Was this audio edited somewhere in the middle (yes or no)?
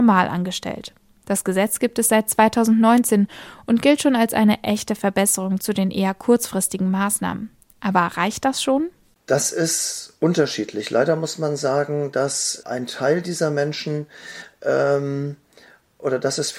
yes